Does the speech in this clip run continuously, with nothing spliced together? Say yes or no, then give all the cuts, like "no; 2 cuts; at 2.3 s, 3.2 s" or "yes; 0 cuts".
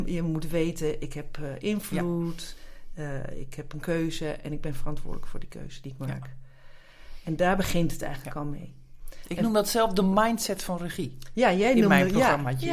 yes; 0 cuts